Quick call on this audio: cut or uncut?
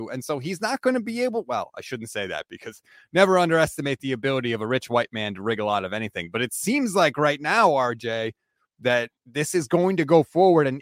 cut